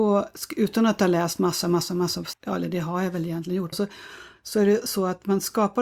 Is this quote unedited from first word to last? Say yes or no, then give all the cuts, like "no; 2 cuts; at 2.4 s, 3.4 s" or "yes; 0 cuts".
no; 2 cuts; at 2.3 s, 3.7 s